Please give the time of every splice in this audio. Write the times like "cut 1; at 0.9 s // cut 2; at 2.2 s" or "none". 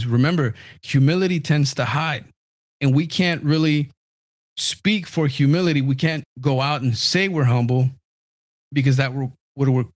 cut 1; at 6.2 s